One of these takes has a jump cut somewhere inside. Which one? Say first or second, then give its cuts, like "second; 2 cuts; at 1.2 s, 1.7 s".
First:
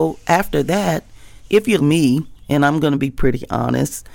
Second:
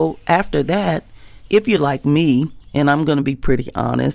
first; 1 cut; at 1.8 s